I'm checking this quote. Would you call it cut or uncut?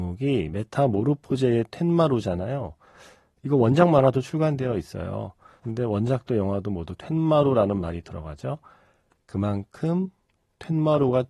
cut